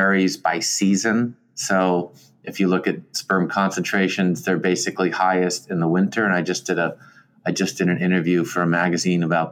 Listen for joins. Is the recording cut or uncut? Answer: uncut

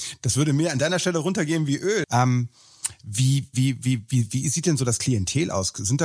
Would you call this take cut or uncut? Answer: cut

